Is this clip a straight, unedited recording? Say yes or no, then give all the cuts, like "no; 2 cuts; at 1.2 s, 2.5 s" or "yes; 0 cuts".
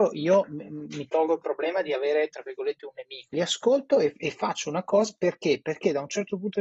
no; 1 cut; at 3.3 s